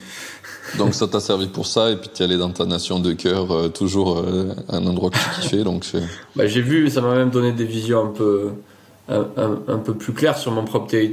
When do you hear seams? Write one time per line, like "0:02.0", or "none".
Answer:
none